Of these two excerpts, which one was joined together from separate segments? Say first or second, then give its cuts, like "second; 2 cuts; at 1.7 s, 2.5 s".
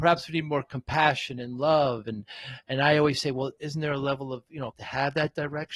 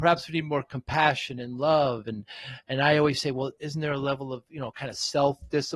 first; 1 cut; at 4.7 s